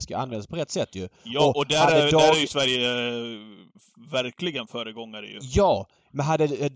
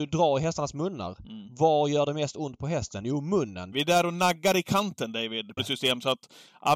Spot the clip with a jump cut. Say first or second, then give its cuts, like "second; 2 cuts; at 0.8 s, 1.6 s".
second; 2 cuts; at 3.7 s, 5.6 s